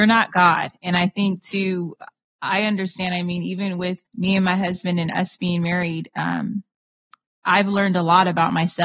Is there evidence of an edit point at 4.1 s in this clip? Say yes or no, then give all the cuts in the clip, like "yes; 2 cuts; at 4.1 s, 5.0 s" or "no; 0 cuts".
yes; 1 cut; at 4.1 s